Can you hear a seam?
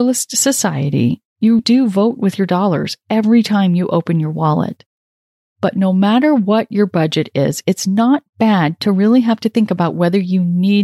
yes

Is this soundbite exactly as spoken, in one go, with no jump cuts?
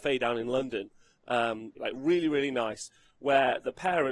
no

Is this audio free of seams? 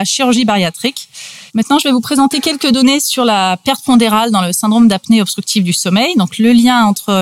no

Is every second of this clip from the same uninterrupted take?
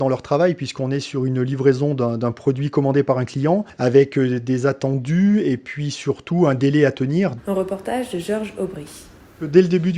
no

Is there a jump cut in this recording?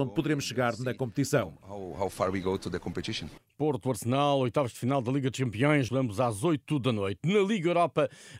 yes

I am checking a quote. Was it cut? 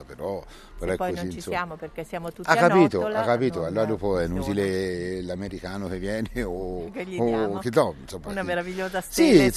no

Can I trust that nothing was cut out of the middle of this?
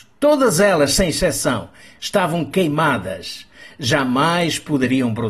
yes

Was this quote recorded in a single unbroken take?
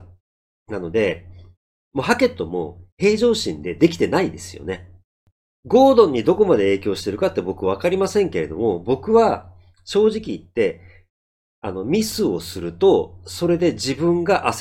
yes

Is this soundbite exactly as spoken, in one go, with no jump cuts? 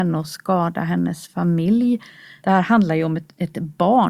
yes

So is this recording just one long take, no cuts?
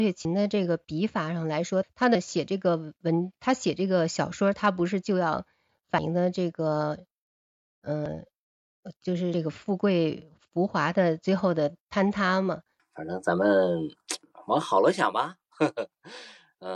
no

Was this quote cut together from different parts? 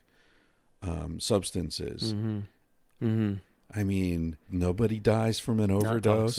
yes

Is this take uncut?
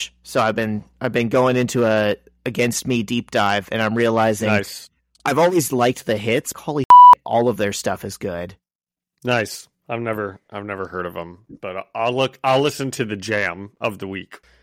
no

